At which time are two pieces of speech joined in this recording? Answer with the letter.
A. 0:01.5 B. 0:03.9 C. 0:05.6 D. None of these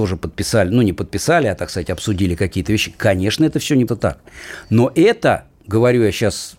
B